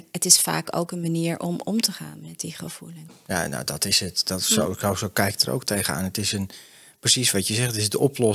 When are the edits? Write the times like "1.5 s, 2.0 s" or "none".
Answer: 3.1 s